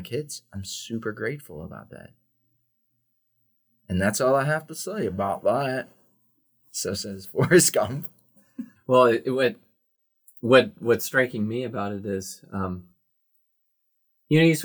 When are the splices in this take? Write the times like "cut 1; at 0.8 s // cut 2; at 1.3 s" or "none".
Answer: cut 1; at 8.8 s